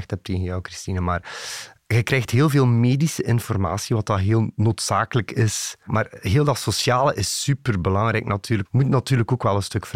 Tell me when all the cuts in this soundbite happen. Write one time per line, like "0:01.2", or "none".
0:08.7